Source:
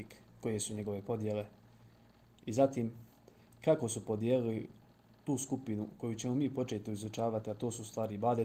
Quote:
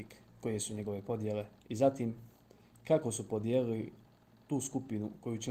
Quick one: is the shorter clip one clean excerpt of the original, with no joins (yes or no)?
no